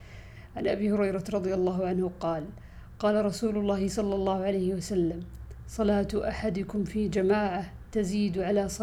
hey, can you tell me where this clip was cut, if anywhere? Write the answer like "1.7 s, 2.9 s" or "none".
none